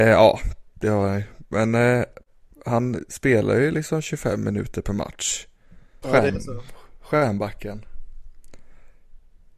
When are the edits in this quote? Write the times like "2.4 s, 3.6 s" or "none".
6.0 s